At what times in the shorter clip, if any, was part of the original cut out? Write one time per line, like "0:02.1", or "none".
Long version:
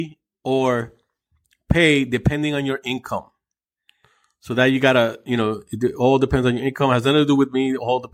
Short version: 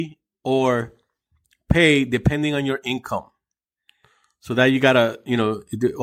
none